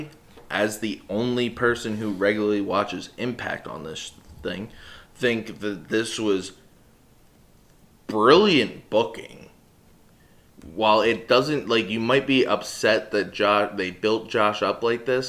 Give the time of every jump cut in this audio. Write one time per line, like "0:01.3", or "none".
none

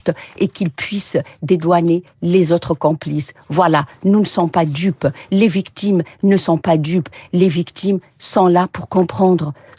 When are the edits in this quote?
none

